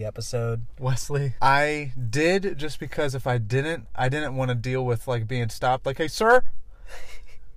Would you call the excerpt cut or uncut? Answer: cut